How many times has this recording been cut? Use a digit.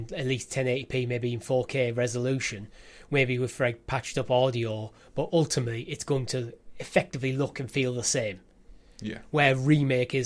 0